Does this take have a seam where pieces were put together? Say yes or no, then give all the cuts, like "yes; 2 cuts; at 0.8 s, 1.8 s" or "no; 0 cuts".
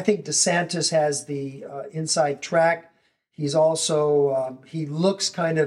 no; 0 cuts